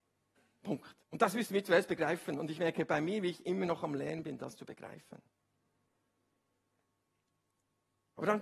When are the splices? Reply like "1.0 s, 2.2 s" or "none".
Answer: 1.0 s